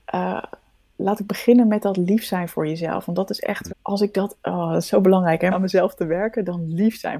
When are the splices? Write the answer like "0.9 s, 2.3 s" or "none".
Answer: 3.7 s, 5.5 s